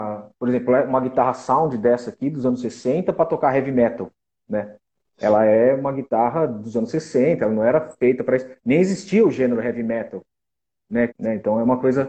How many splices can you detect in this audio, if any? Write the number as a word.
one